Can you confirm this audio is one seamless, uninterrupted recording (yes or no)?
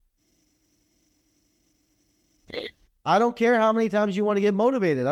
no